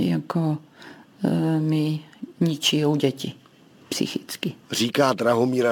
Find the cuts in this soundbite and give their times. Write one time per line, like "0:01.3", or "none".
0:04.6